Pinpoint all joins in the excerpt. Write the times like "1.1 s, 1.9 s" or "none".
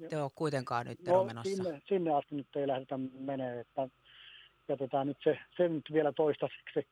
1.8 s